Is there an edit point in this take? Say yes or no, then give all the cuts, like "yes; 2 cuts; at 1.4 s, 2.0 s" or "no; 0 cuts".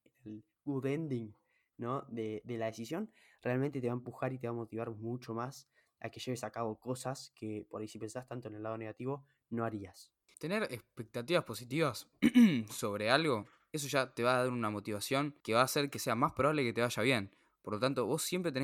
yes; 2 cuts; at 10.3 s, 15.4 s